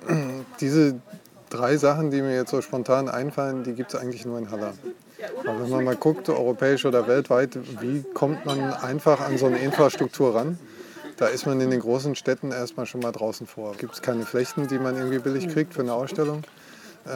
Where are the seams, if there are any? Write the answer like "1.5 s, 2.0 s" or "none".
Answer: 13.7 s